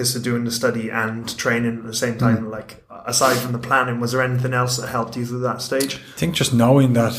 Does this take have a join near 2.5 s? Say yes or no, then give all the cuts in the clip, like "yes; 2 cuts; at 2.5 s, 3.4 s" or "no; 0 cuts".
no; 0 cuts